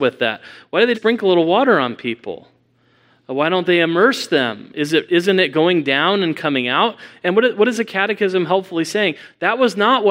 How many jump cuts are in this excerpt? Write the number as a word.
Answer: one